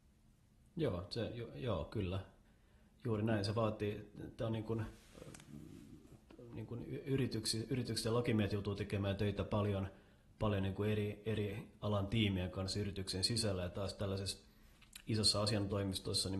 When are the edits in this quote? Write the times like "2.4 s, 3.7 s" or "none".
none